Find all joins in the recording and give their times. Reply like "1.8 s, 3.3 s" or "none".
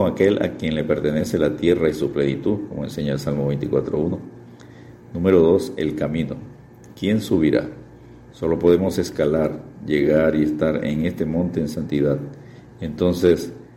8.3 s